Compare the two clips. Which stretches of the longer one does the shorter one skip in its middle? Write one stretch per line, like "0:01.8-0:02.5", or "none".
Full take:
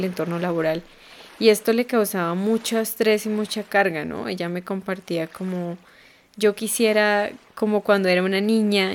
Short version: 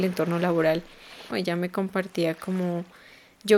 0:01.3-0:04.2